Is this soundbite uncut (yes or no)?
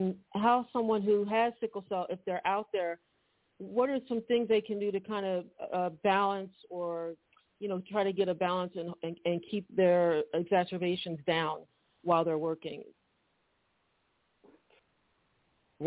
yes